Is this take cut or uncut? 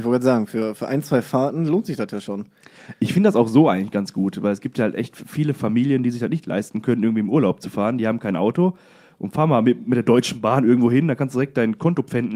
uncut